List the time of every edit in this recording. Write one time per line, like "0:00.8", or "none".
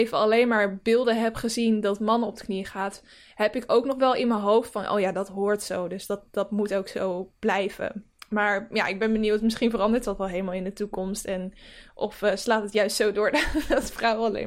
none